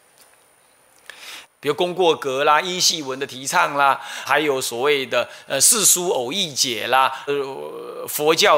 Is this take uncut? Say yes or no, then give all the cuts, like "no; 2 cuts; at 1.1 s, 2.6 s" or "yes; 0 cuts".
no; 3 cuts; at 1.4 s, 4.3 s, 7.3 s